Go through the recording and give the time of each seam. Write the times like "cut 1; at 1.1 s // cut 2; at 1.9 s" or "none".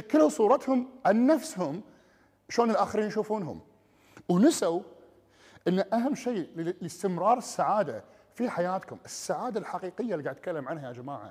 none